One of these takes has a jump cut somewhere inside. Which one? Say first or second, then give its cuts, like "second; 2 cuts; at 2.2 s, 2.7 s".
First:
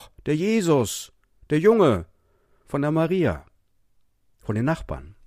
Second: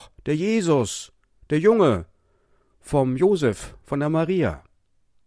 first; 1 cut; at 2.6 s